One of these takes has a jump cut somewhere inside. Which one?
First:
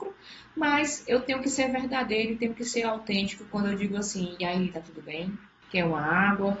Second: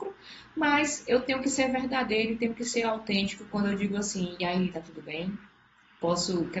first; 1 cut; at 5.6 s

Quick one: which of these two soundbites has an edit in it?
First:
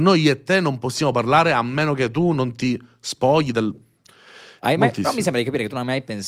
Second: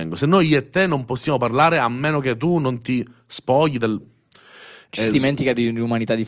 first; 1 cut; at 4.6 s

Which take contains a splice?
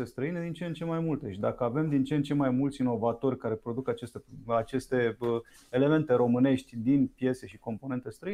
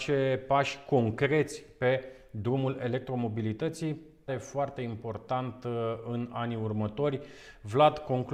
second; 1 cut; at 4.3 s

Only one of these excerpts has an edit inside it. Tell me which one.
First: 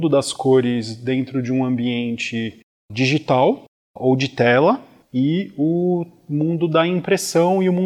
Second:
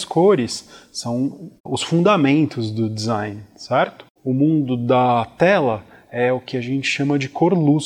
second; 2 cuts; at 1.6 s, 4.2 s

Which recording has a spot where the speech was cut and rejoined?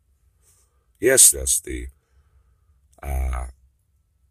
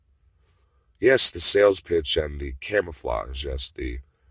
first; 1 cut; at 1.3 s

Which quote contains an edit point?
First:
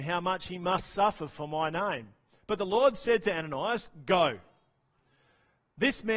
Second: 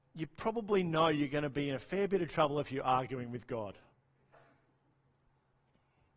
first; 1 cut; at 2.4 s

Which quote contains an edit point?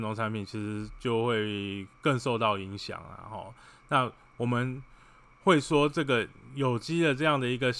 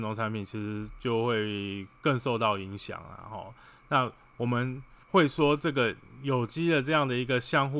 second; 1 cut; at 5.0 s

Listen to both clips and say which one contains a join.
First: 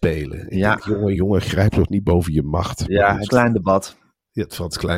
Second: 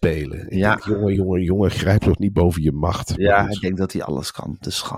first; 2 cuts; at 1.2 s, 3.3 s

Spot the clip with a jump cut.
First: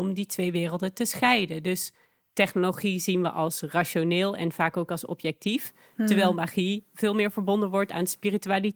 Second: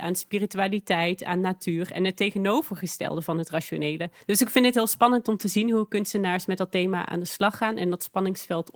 second; 1 cut; at 4.2 s

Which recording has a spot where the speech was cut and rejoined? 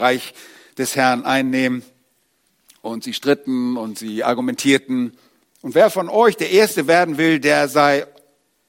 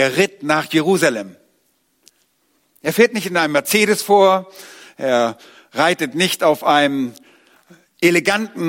first; 1 cut; at 5.4 s

